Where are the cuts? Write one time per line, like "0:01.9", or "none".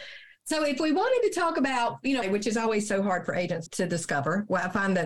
0:02.2
0:03.7